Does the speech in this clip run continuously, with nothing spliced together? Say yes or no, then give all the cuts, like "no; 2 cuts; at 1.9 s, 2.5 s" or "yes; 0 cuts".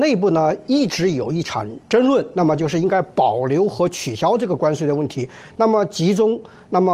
yes; 0 cuts